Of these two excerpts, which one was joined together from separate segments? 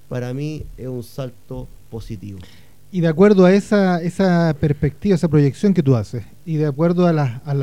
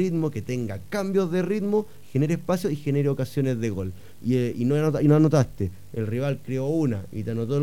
second; 1 cut; at 4.2 s

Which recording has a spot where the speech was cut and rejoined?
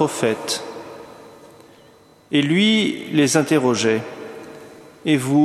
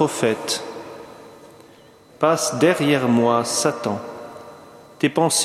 second; 1 cut; at 2.1 s

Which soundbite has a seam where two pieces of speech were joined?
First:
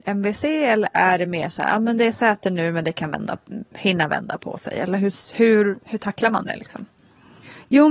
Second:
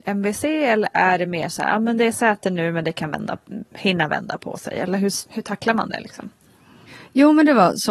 second; 1 cut; at 5.2 s

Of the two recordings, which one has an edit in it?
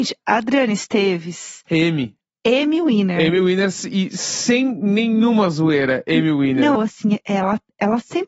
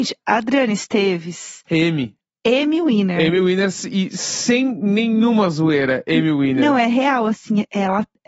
first; 1 cut; at 6.8 s

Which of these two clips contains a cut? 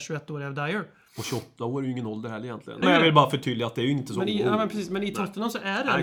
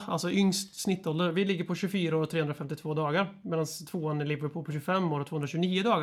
first; 1 cut; at 2.8 s

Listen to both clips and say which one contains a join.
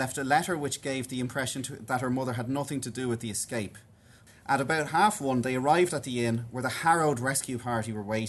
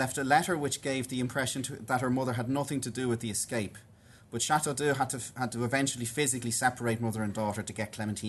first; 1 cut; at 4.3 s

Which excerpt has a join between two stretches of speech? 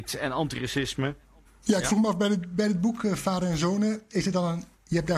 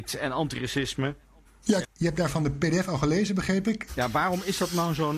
second; 2 cuts; at 1.8 s, 3.9 s

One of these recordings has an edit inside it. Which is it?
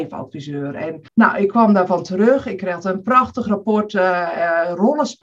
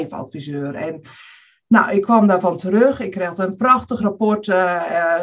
first; 1 cut; at 1.1 s

